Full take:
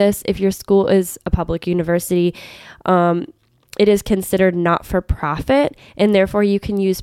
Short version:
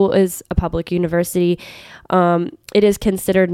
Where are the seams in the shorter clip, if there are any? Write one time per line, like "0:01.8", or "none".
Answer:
0:02.6